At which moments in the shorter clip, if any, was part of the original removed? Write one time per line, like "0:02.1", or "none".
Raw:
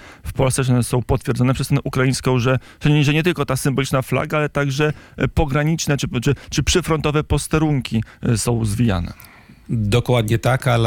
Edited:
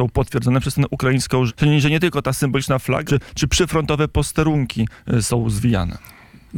0:01.5
0:03.1